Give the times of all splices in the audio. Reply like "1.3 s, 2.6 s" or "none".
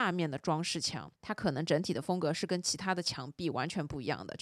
1.1 s